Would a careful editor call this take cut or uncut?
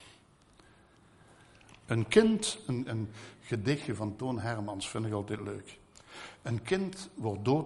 uncut